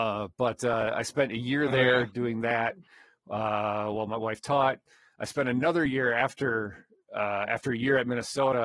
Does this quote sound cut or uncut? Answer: uncut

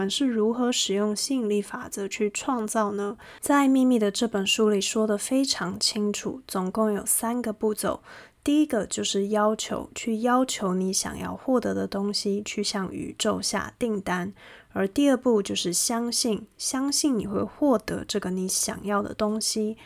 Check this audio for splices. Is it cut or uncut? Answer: uncut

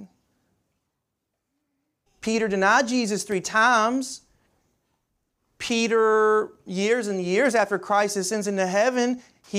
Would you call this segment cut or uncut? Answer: cut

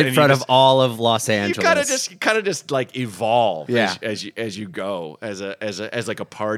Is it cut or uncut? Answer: uncut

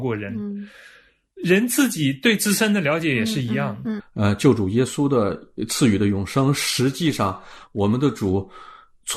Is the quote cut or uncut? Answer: cut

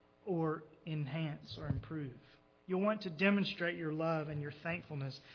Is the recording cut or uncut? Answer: cut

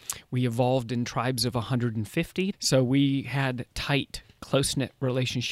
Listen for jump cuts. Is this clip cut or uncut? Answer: cut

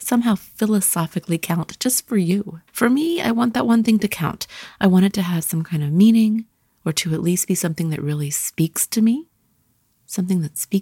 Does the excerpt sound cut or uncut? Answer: cut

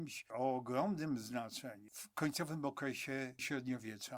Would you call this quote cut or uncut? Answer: uncut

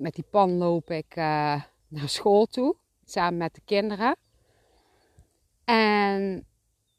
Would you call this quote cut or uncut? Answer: uncut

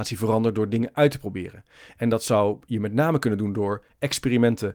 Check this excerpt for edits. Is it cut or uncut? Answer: uncut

